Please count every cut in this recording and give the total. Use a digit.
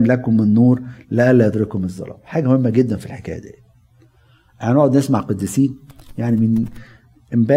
0